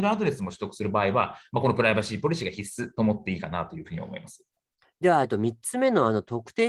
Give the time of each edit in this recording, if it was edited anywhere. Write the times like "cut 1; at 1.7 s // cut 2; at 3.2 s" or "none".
cut 1; at 4.8 s